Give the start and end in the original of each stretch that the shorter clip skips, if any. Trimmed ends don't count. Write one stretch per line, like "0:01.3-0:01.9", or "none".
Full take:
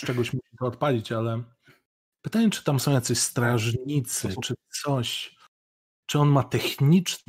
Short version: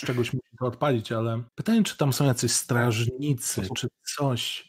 0:01.5-0:02.1